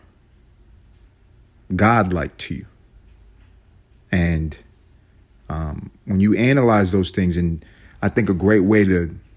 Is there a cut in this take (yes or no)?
no